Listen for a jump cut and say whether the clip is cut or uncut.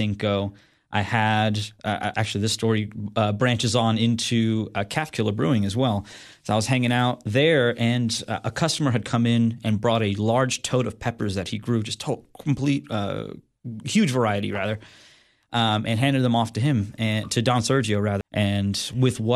cut